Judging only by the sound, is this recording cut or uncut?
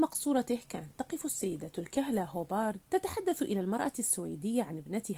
cut